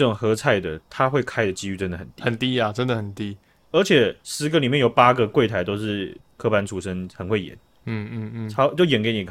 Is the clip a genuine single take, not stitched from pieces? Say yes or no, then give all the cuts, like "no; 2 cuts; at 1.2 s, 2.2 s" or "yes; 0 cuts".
yes; 0 cuts